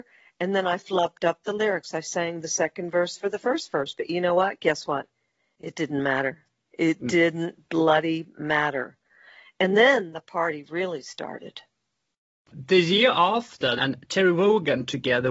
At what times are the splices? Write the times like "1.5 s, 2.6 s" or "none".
13.8 s